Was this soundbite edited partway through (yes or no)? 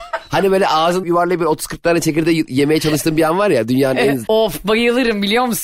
yes